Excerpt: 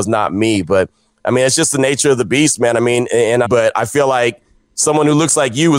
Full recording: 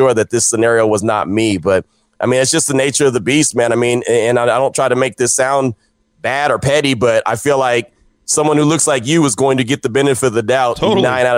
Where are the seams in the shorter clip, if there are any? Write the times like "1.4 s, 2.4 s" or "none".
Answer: 3.4 s